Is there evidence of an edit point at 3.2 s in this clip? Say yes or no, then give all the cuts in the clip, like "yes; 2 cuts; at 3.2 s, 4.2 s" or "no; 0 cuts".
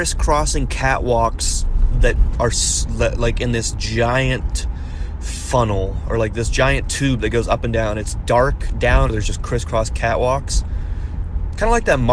no; 1 cut; at 9.1 s